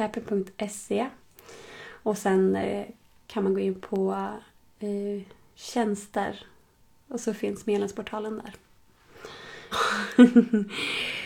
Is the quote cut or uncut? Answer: cut